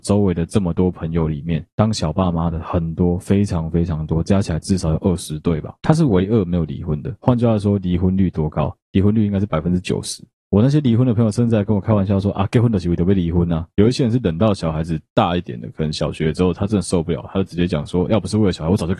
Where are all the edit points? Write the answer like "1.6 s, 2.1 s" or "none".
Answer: none